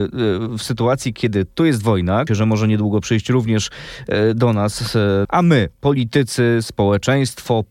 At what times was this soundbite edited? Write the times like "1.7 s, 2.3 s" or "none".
2.3 s, 5.2 s

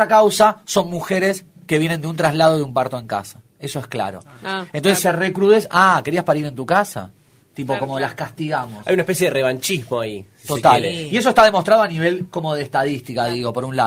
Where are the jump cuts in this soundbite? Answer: none

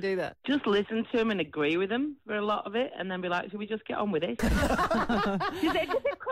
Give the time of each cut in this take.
4.4 s

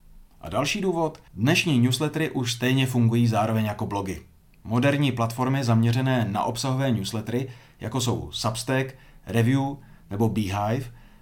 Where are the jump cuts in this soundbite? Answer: 1.3 s

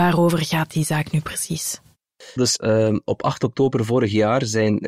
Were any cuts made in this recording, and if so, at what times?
2.4 s

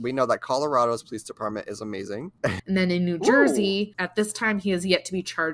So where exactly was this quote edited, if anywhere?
2.6 s, 3.9 s

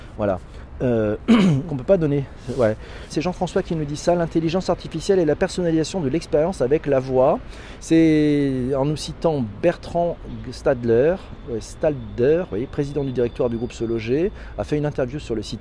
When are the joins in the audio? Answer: 1.7 s, 3.1 s, 7.8 s

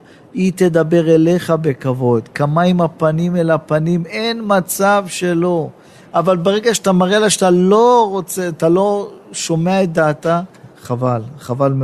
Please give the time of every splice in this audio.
10.7 s

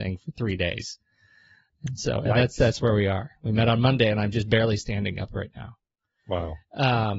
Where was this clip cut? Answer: none

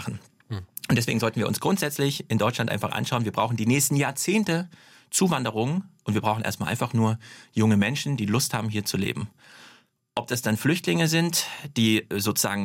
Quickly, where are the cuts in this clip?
none

